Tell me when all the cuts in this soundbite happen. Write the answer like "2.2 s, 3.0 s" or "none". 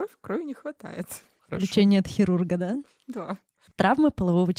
none

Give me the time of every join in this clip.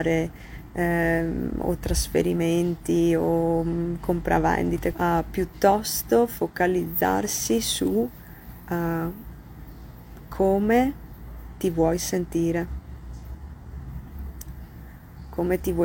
4.9 s

